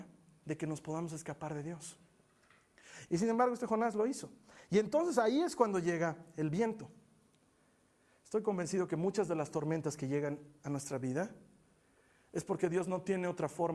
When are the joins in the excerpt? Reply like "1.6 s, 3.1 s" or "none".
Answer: 3.1 s

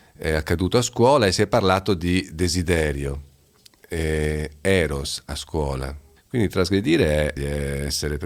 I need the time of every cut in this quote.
6.2 s, 7.4 s

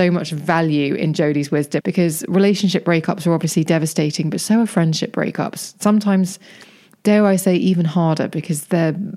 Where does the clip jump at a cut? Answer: 1.8 s

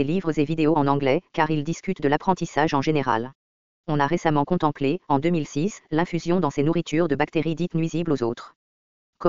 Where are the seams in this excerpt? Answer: 3.7 s

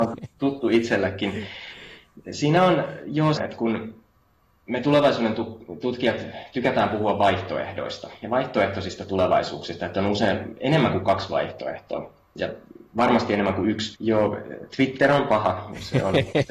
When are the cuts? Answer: 3.4 s, 13.9 s

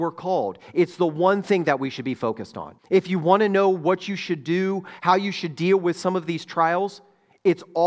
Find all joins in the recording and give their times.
2.8 s, 5.0 s

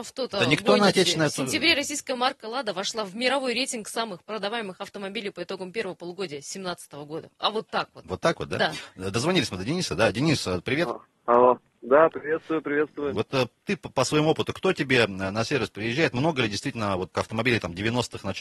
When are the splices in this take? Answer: 13.1 s, 17.1 s

